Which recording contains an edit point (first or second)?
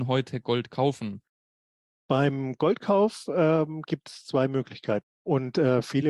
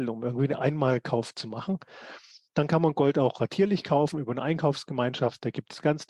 first